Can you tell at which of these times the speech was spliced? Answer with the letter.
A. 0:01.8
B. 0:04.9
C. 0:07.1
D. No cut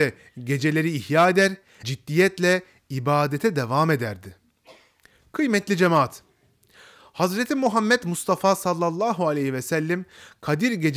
A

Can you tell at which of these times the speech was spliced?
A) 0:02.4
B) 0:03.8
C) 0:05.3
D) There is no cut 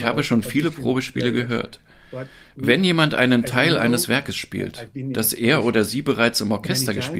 D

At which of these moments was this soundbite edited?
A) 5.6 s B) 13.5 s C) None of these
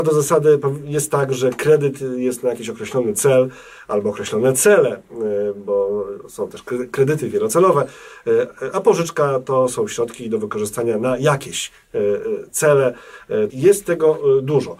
B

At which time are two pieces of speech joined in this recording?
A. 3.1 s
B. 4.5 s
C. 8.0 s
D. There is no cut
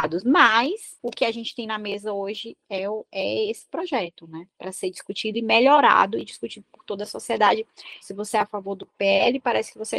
C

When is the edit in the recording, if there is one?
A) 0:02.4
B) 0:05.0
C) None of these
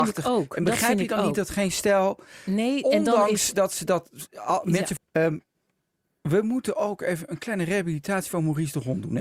B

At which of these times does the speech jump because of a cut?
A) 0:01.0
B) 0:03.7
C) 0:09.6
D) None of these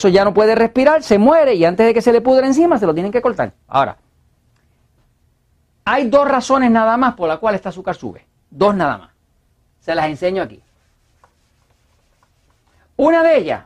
B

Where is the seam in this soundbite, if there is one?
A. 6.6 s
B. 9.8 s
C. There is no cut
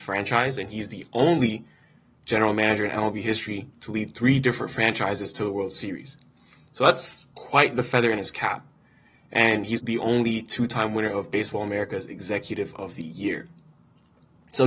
B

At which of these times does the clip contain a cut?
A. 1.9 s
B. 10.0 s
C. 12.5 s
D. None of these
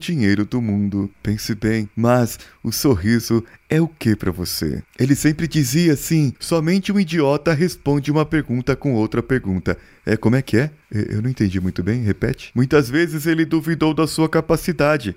A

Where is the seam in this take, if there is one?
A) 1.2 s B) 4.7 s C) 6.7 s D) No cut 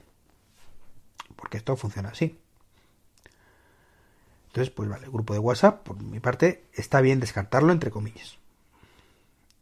D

